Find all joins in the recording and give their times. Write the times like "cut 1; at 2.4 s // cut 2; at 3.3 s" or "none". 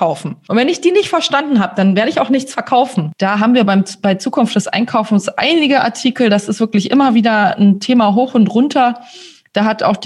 none